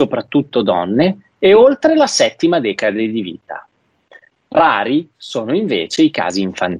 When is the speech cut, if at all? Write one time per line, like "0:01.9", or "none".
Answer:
none